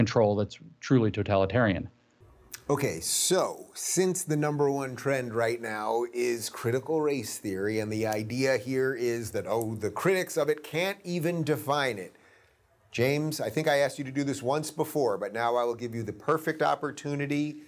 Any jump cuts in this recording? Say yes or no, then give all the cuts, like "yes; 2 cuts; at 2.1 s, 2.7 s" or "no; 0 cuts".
no; 0 cuts